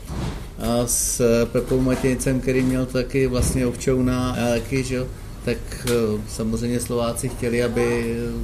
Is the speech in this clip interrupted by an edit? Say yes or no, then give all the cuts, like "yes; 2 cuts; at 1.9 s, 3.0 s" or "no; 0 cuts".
yes; 1 cut; at 4.3 s